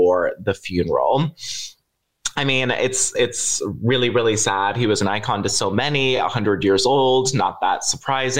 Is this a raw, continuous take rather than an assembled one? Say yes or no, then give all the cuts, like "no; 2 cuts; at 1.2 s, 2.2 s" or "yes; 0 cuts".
yes; 0 cuts